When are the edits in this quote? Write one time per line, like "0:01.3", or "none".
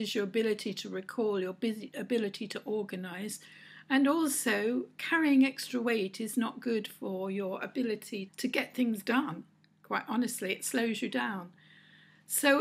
0:08.3